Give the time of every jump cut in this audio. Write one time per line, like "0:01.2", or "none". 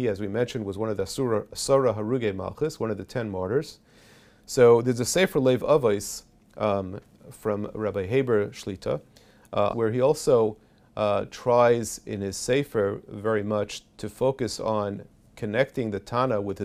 0:09.7